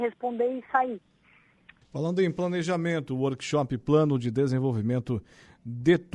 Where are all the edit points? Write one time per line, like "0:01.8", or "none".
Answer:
0:01.8